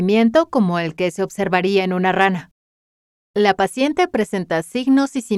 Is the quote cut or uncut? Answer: cut